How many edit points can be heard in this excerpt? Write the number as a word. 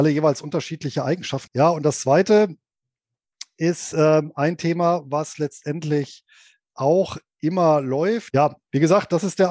two